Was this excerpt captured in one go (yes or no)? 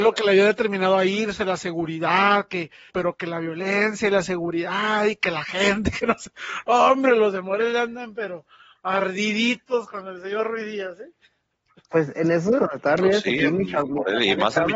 no